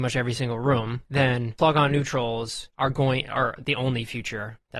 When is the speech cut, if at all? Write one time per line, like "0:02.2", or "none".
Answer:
0:03.6